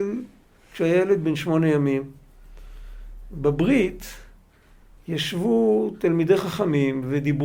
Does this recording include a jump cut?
no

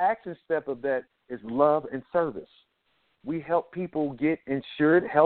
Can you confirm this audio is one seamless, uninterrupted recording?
no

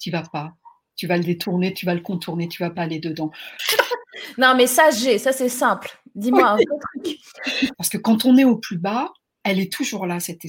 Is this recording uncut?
no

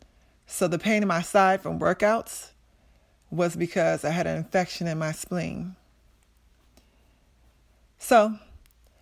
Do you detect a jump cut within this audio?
no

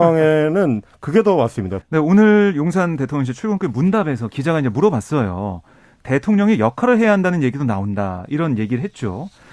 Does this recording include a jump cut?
yes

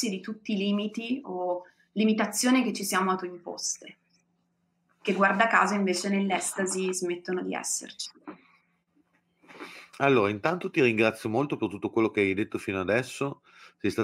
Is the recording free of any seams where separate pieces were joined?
no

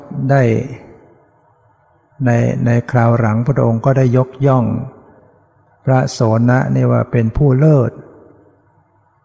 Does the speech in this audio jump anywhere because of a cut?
no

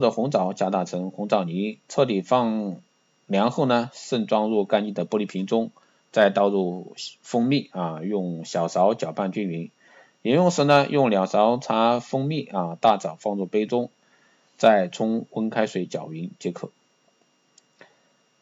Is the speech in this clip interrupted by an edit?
no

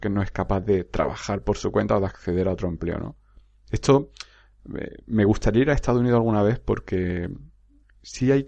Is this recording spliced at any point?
no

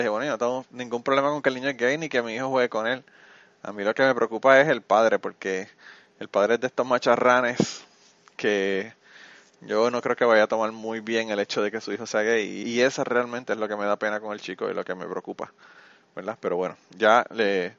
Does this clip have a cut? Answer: yes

